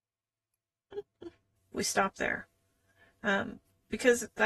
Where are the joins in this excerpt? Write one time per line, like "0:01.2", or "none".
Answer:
0:01.6